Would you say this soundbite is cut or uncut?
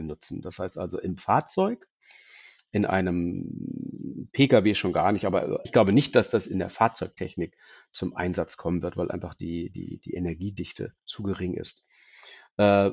cut